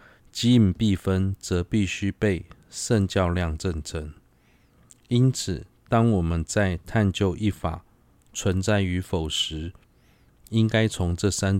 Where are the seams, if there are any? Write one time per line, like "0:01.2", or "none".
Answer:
none